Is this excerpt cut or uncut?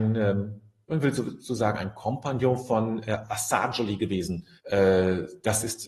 cut